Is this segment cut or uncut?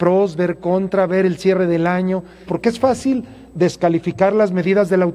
cut